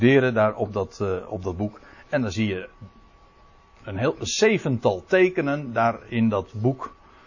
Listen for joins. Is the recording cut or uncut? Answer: uncut